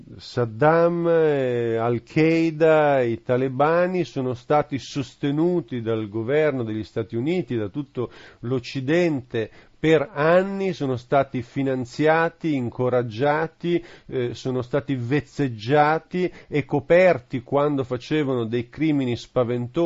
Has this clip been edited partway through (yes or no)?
no